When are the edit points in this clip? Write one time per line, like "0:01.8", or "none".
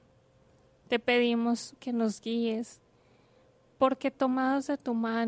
0:01.8